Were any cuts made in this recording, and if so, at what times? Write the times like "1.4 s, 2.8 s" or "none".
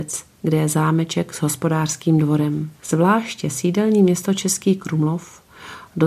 2.7 s